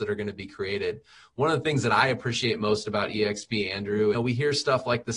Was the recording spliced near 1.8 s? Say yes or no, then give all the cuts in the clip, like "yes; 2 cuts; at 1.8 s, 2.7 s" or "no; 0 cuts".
no; 1 cut; at 4.1 s